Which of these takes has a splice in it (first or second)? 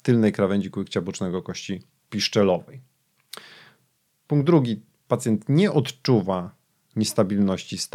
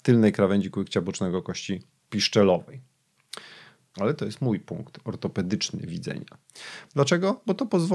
second